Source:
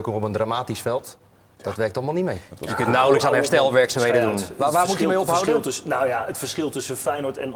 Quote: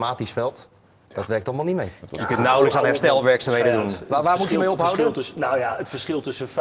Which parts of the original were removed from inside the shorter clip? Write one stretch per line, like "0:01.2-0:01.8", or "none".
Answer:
none